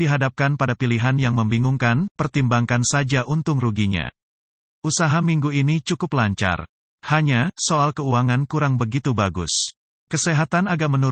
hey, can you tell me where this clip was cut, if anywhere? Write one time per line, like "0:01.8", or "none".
none